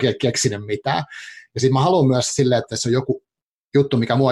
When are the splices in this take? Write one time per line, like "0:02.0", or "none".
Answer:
none